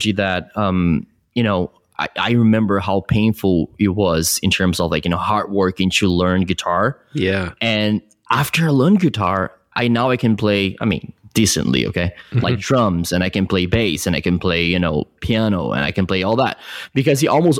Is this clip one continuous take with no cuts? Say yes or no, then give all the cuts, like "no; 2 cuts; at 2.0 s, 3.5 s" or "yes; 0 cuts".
yes; 0 cuts